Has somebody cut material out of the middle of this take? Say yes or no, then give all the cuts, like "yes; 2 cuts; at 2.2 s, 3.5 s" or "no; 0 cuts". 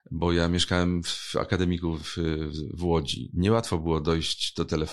no; 0 cuts